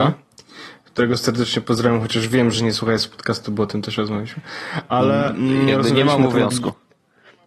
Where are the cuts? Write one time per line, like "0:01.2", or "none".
none